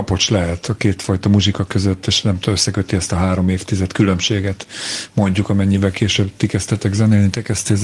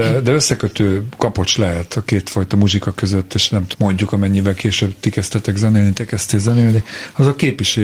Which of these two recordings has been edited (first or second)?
second